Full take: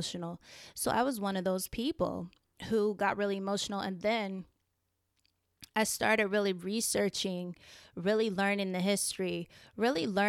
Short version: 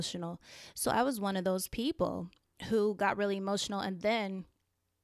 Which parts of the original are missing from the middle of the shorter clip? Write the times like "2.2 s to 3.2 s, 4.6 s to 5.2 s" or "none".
none